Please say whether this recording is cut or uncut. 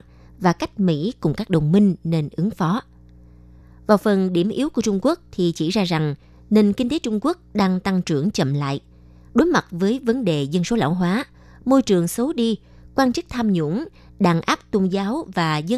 uncut